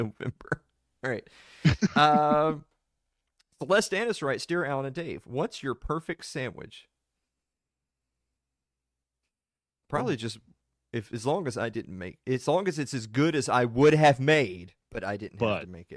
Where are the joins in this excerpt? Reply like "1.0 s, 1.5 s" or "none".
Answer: 14.8 s